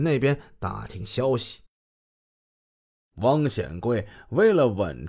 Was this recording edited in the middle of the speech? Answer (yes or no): yes